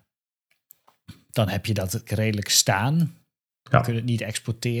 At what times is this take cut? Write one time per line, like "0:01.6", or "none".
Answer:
0:02.1